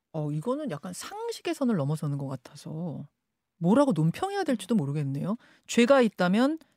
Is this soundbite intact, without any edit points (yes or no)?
yes